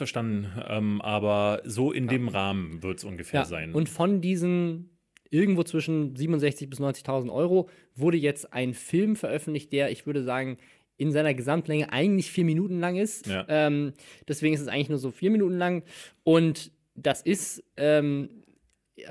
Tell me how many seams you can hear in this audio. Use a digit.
1